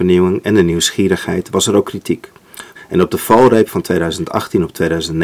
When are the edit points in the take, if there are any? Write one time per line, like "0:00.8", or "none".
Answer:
0:02.8